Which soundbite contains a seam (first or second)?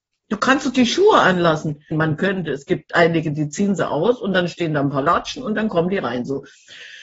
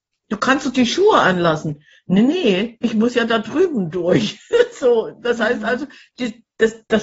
first